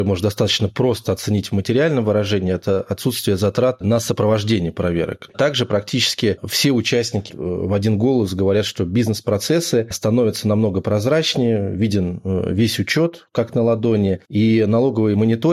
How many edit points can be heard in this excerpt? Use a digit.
2